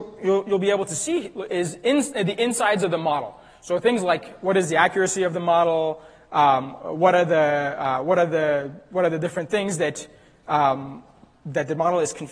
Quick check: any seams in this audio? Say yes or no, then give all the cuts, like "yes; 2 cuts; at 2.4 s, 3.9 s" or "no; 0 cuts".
no; 0 cuts